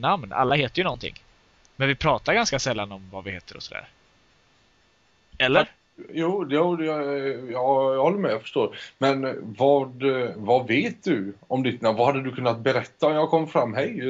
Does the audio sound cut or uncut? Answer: uncut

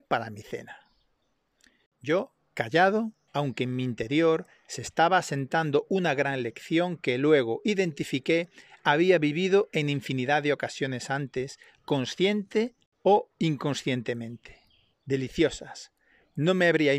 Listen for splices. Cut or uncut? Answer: cut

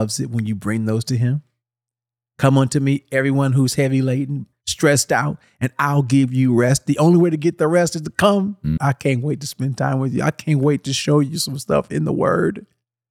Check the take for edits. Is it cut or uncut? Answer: cut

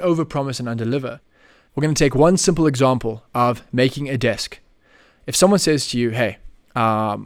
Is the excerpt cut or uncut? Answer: uncut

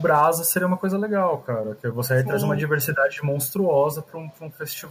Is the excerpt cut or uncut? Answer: uncut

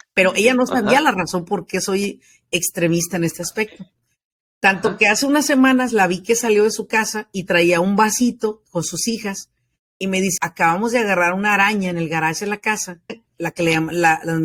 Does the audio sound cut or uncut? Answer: cut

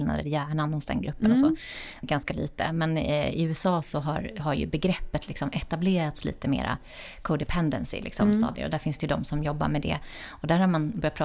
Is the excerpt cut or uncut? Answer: cut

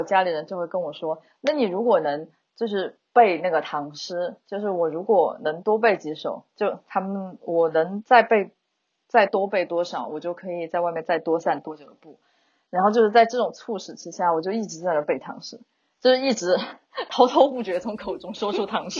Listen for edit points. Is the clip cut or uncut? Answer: uncut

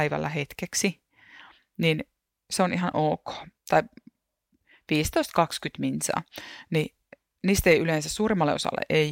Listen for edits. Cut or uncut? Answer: cut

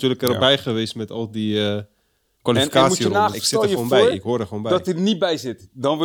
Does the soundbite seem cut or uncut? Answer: cut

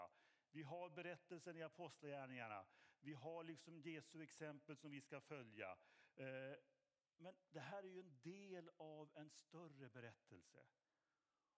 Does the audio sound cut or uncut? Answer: uncut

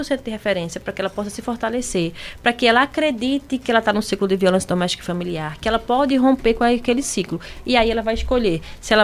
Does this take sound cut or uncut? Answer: uncut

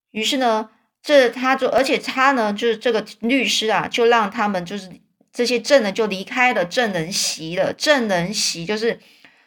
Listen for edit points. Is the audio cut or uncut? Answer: uncut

